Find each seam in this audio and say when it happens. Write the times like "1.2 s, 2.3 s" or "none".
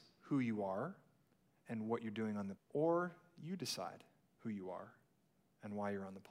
2.6 s